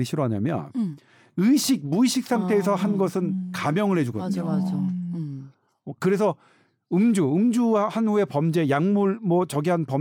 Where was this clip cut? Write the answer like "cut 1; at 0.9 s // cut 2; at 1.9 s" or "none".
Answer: none